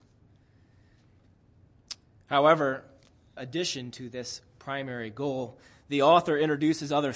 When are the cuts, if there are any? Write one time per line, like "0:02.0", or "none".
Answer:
0:03.4

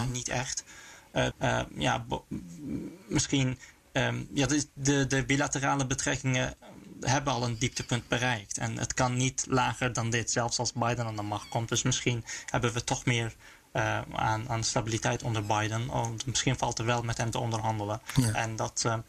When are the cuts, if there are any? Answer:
0:01.3

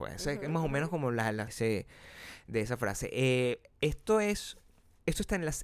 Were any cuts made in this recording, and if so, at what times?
0:01.5

